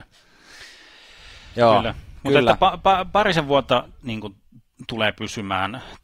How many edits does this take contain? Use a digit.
1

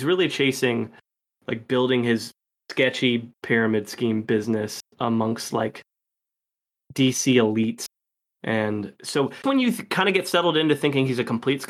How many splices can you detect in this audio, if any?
2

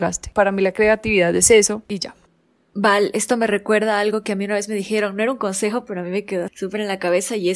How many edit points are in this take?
1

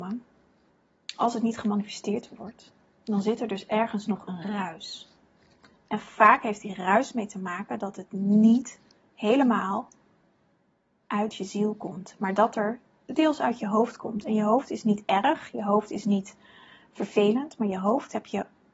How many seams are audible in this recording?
0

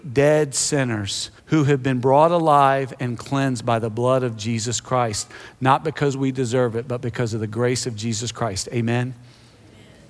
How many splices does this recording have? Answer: 1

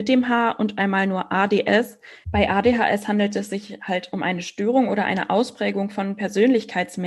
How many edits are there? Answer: 1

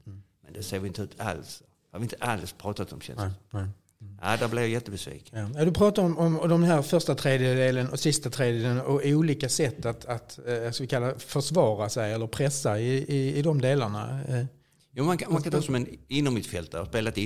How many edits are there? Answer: 0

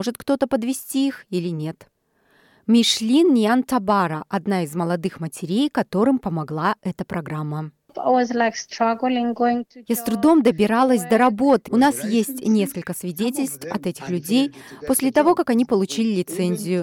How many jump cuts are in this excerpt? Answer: 1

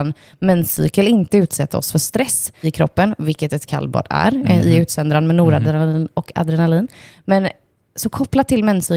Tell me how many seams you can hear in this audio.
1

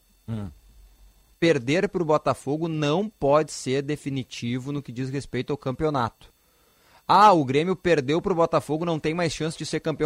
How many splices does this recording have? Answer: 0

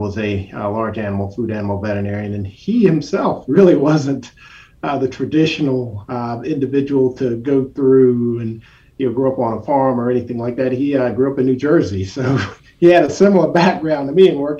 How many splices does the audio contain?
0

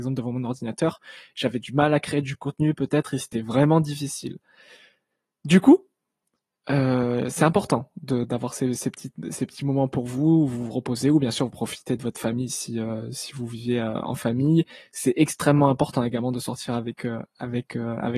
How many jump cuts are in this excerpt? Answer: 0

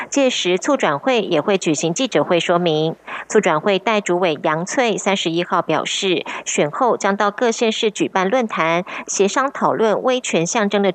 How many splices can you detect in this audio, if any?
1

